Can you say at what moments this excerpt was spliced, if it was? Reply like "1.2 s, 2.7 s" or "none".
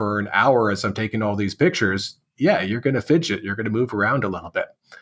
none